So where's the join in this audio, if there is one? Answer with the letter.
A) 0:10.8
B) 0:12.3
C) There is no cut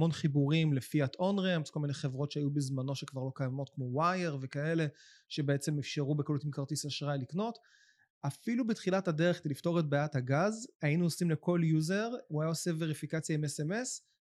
B